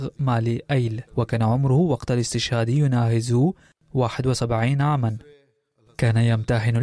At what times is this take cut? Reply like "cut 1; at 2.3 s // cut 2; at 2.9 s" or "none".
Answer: cut 1; at 1.1 s